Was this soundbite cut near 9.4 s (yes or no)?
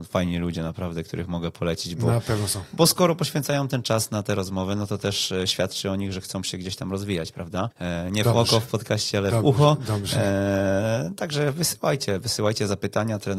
no